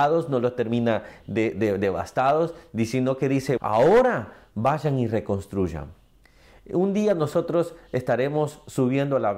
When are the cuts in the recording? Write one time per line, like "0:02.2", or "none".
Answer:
0:03.6